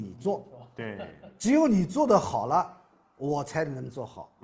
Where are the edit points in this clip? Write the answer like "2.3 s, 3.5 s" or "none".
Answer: none